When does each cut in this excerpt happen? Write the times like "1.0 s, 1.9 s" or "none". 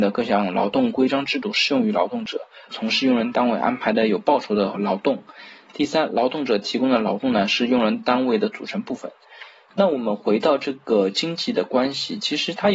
2.7 s